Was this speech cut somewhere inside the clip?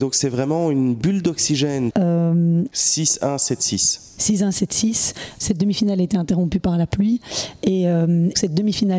yes; 1 cut; at 1.9 s

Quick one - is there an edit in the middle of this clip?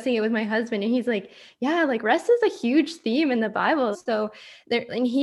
yes; 1 cut; at 3.9 s

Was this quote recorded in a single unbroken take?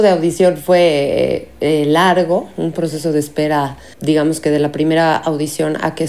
no; 1 cut; at 3.9 s

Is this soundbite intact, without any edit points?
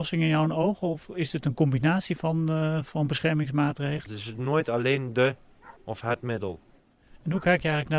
no; 2 cuts; at 4.1 s, 5.8 s

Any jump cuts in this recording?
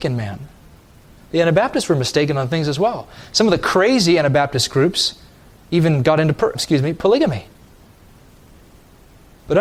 yes; 1 cut; at 6.5 s

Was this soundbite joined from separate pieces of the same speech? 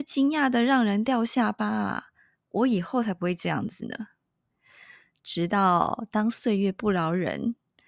no; 0 cuts

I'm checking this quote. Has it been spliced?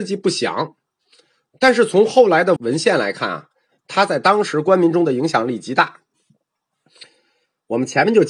yes; 1 cut; at 2.6 s

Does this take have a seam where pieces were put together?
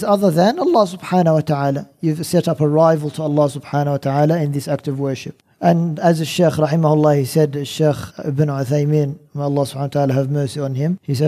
no; 0 cuts

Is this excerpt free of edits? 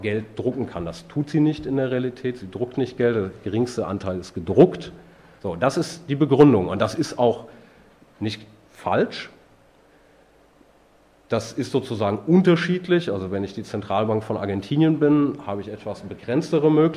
no; 1 cut; at 5.4 s

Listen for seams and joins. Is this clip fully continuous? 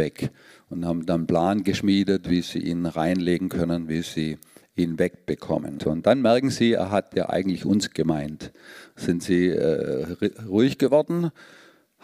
no; 1 cut; at 5.8 s

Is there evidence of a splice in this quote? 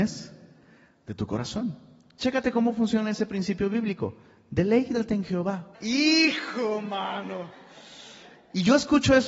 yes; 1 cut; at 5.7 s

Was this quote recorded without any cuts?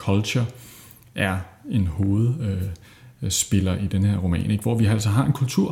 yes; 0 cuts

